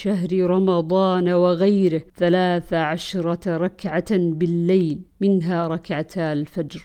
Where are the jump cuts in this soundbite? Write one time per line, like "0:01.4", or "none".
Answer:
0:02.1
0:05.1